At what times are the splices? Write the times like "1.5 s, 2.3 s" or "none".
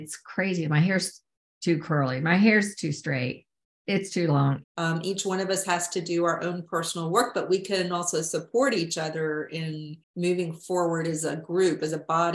4.6 s, 10.0 s

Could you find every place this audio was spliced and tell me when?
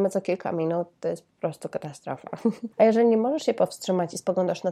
2.7 s

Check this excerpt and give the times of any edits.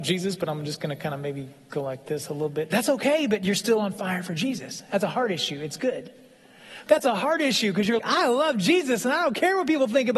6.9 s, 8.0 s

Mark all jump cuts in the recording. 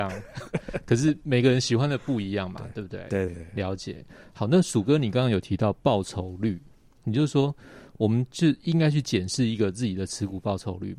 3.3 s

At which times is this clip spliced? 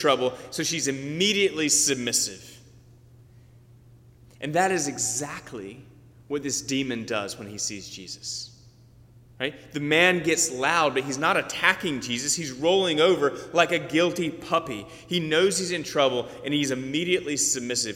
none

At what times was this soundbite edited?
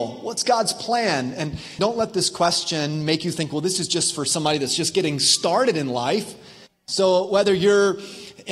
1.8 s, 6.7 s

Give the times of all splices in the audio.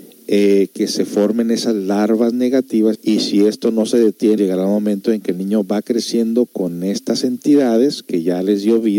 2.9 s, 4.4 s

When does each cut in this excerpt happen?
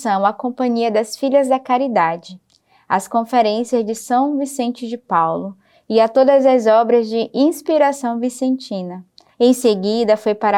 9.3 s

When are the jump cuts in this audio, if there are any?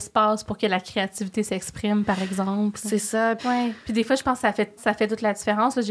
3.4 s, 4.8 s

